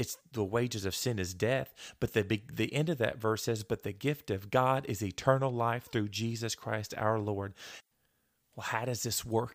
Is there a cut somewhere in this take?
no; 0 cuts

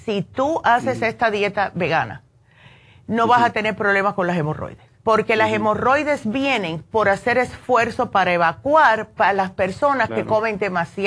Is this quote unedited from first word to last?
no; 1 cut; at 5.0 s

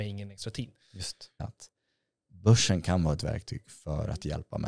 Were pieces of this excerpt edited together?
yes; 1 cut; at 1.4 s

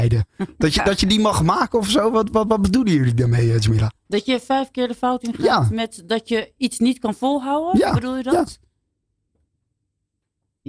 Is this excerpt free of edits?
yes; 0 cuts

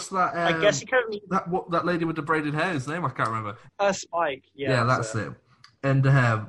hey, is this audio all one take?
no; 1 cut; at 3.7 s

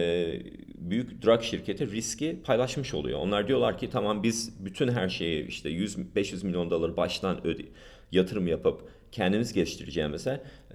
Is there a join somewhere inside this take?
no; 0 cuts

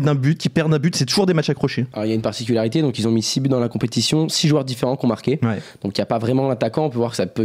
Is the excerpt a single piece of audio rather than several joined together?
no; 1 cut; at 1.9 s

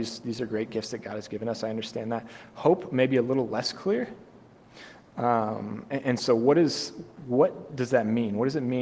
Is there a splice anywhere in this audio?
no; 0 cuts

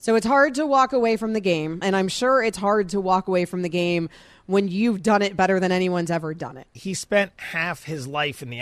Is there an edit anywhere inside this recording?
yes; 2 cuts; at 1.8 s, 6.8 s

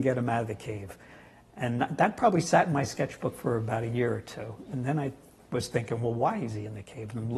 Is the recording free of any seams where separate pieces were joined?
yes; 0 cuts

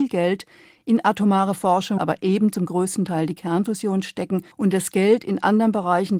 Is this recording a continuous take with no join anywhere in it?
no; 2 cuts; at 2.0 s, 4.5 s

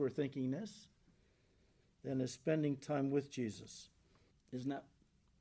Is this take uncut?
no; 1 cut; at 4.3 s

